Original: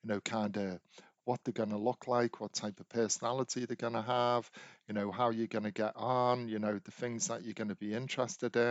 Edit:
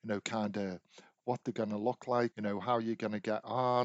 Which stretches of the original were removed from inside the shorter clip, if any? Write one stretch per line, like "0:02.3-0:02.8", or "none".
0:02.3-0:04.8